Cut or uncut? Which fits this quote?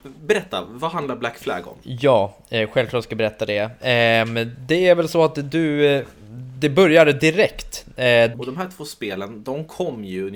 cut